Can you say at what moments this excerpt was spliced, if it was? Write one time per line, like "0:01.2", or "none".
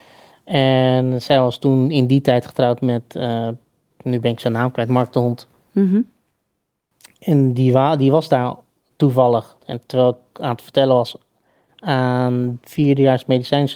none